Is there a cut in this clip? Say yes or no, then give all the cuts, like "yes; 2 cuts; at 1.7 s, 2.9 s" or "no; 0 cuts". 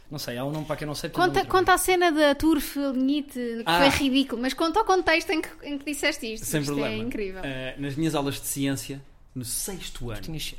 yes; 1 cut; at 3.6 s